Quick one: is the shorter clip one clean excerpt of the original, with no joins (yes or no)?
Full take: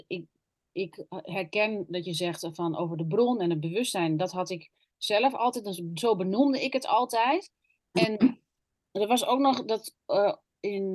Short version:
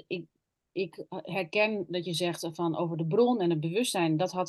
yes